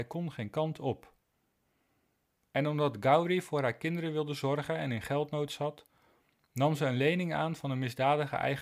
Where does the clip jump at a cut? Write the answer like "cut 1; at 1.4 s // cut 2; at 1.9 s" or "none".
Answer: none